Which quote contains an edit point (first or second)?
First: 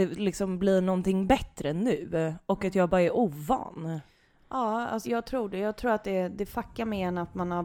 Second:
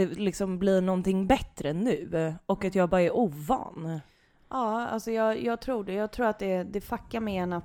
first